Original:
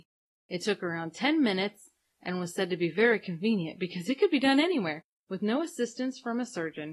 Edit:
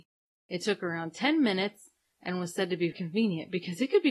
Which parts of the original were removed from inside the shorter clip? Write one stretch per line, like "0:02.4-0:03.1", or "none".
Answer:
0:02.9-0:03.2

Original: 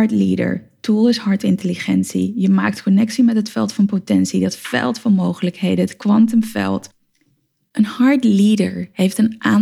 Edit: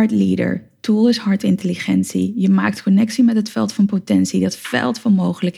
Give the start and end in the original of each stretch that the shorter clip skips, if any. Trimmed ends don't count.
none

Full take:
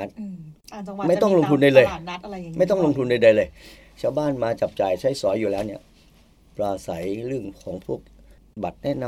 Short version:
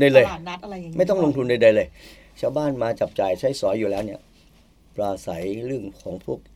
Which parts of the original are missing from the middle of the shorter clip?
none

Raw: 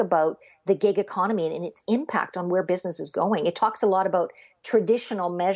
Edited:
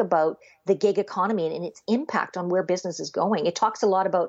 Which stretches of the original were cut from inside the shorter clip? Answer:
none

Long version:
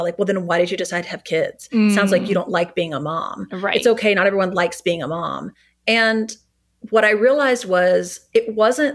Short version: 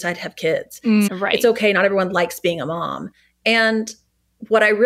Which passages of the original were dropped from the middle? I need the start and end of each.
0:01.9-0:03.5

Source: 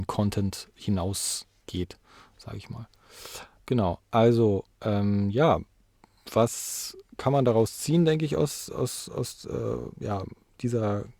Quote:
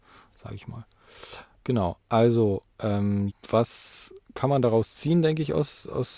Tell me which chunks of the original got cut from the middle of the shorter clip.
0:05.3-0:06.1

